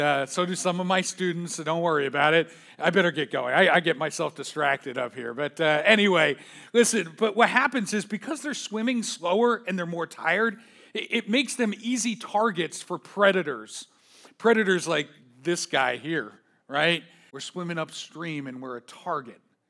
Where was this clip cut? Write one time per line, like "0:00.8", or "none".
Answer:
0:17.3